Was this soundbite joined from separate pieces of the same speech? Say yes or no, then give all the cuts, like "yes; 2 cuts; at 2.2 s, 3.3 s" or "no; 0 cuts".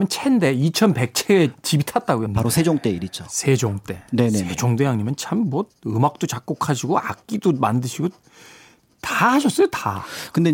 yes; 1 cut; at 2.3 s